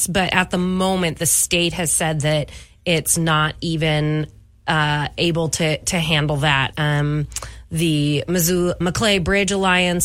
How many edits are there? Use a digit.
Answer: 2